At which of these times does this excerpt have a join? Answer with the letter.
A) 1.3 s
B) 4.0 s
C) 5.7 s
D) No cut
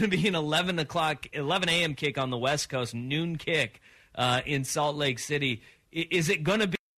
A